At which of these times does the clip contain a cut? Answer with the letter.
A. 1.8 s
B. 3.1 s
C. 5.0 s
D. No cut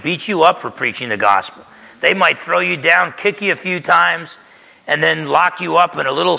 D